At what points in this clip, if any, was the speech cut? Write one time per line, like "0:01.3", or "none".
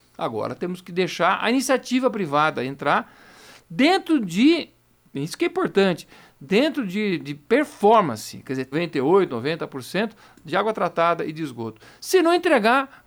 0:08.7